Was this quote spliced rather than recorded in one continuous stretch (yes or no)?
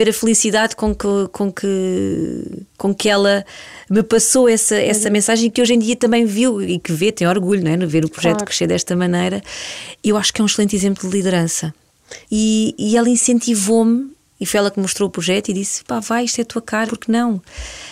yes